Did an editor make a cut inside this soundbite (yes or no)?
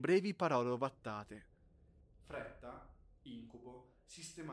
no